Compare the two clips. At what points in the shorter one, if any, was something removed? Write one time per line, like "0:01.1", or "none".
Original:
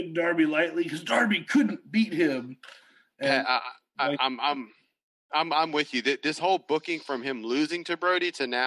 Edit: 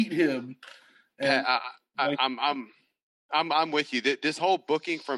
none